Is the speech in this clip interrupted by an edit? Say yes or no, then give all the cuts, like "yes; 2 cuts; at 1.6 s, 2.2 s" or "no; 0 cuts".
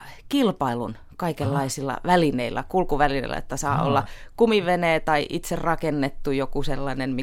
no; 0 cuts